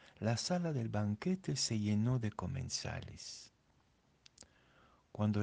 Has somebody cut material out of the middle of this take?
no; 0 cuts

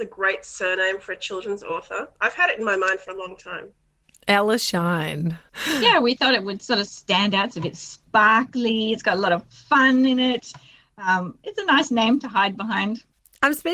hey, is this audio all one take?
yes; 0 cuts

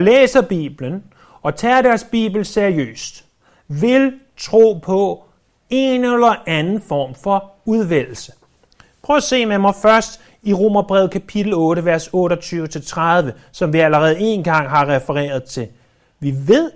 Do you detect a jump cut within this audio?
no; 0 cuts

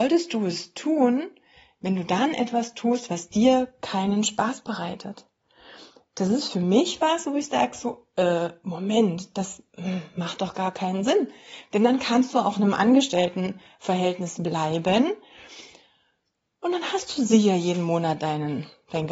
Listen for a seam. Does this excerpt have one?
no; 0 cuts

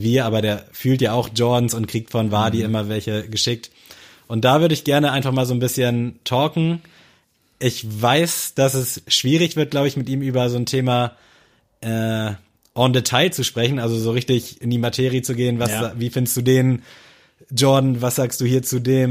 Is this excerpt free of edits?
yes; 0 cuts

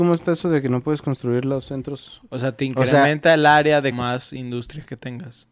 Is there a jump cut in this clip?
yes; 1 cut; at 3.9 s

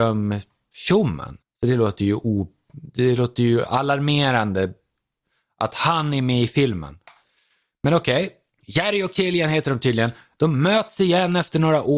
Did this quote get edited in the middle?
yes; 1 cut; at 1.4 s

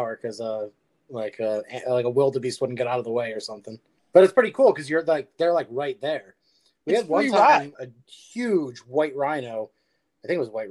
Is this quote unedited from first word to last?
no; 2 cuts; at 4.0 s, 7.7 s

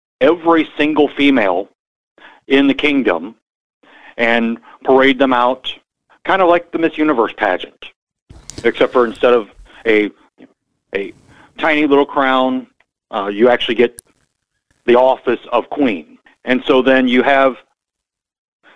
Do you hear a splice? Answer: yes; 1 cut; at 16.3 s

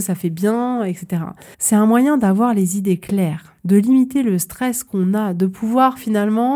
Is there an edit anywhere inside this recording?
yes; 2 cuts; at 1.5 s, 3.6 s

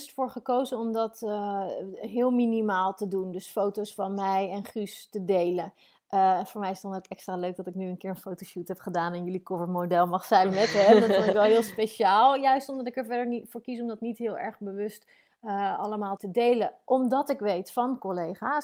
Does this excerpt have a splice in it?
yes; 1 cut; at 16.2 s

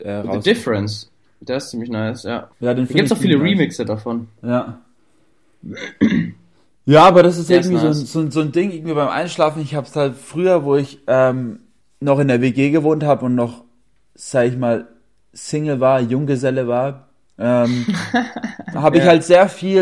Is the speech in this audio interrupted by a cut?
yes; 2 cuts; at 2.5 s, 18.7 s

